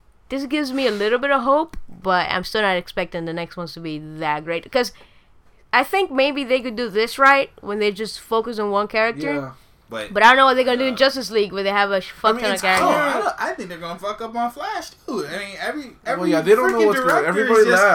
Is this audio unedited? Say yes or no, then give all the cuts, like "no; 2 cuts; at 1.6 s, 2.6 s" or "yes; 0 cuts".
yes; 0 cuts